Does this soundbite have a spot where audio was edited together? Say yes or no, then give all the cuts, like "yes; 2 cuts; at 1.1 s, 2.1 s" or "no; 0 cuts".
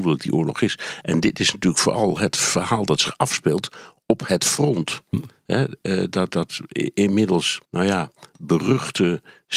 yes; 2 cuts; at 6.3 s, 7.6 s